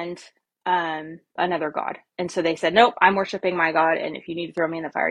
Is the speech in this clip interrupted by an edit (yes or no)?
yes